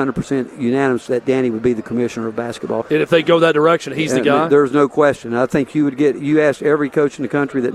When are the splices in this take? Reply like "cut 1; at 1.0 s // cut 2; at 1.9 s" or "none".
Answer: cut 1; at 2.8 s